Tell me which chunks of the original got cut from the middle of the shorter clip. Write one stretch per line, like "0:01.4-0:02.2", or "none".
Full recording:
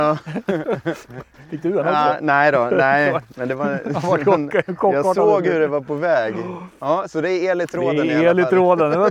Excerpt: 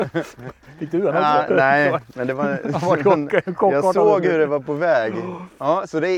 0:02.2-0:02.7